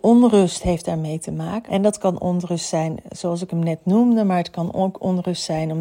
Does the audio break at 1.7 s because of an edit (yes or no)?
yes